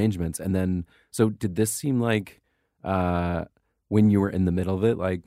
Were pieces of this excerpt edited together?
no; 0 cuts

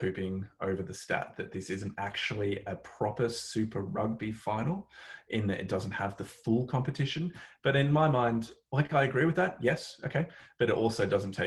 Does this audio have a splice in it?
no; 0 cuts

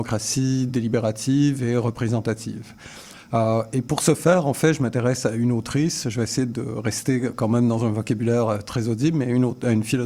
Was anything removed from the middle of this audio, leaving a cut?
no; 0 cuts

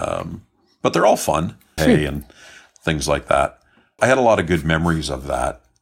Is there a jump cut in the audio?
yes; 2 cuts; at 1.8 s, 4.0 s

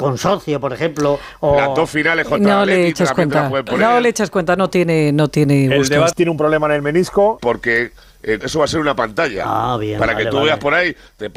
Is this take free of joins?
no; 3 cuts; at 6.1 s, 7.4 s, 8.4 s

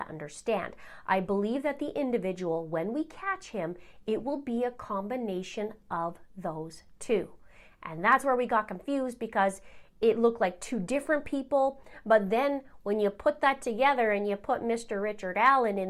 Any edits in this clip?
no; 0 cuts

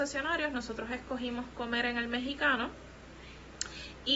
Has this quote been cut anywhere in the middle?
no; 0 cuts

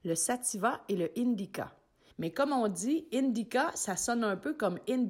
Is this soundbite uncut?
no; 1 cut; at 2.1 s

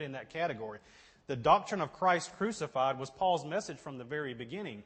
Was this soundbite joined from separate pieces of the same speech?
no; 0 cuts

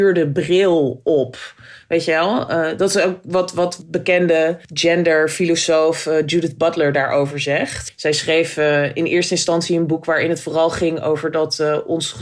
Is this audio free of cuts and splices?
yes; 0 cuts

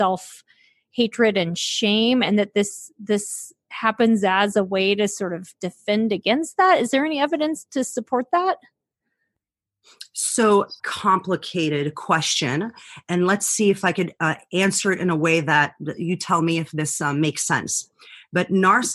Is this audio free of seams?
no; 1 cut; at 10.8 s

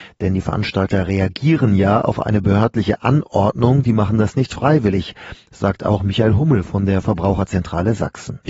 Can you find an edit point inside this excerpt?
no; 0 cuts

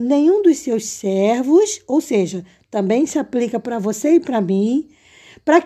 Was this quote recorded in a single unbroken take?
yes; 0 cuts

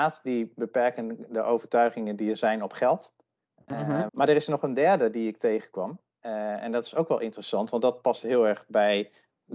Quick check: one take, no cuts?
no; 1 cut; at 4.1 s

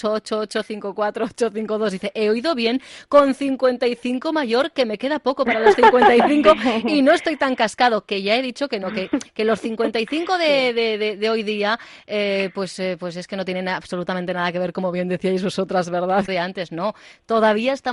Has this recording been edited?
yes; 1 cut; at 16.3 s

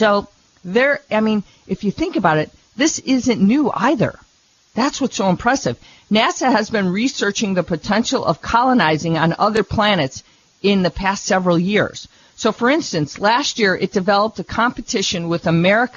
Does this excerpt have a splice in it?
no; 0 cuts

